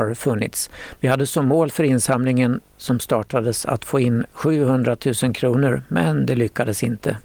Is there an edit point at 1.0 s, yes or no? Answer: yes